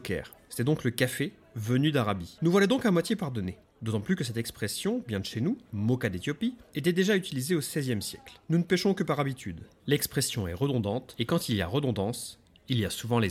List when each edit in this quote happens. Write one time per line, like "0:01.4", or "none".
0:02.4
0:09.8